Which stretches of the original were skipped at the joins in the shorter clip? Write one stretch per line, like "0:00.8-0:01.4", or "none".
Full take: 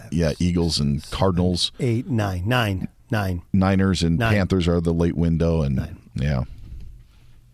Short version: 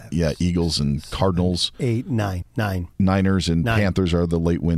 0:02.4-0:03.0